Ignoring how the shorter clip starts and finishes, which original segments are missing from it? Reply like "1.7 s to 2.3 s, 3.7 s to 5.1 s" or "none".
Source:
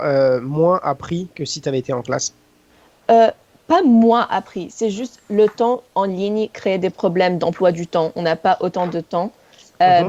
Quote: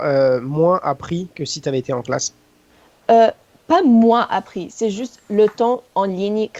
none